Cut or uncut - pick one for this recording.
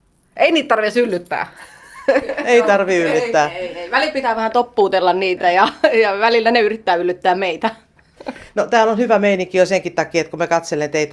uncut